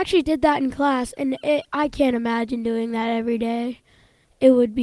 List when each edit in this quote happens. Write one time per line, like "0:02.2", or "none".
none